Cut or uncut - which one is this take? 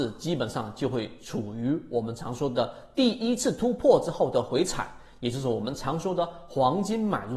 uncut